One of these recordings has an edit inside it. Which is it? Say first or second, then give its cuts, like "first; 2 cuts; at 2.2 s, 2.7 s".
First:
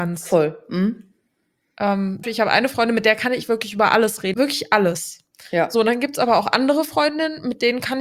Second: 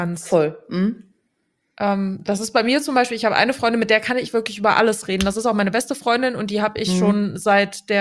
first; 2 cuts; at 2.2 s, 4.3 s